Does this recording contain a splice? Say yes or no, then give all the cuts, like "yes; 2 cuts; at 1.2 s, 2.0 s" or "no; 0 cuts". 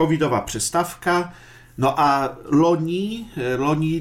no; 0 cuts